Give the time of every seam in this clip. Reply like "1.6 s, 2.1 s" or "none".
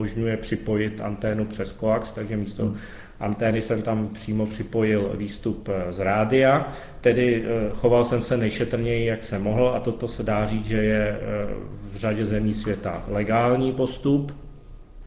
none